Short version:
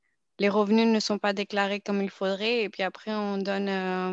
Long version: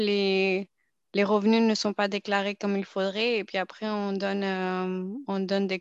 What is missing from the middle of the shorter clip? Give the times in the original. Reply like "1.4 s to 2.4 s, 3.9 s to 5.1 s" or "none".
none